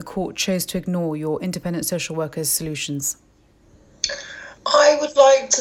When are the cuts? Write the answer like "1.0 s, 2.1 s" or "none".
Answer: 4.6 s